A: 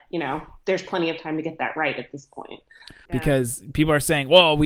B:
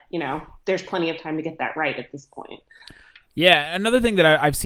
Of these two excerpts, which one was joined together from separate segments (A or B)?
A